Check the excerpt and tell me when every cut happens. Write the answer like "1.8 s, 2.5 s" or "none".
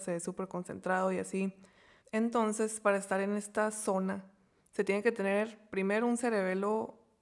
2.0 s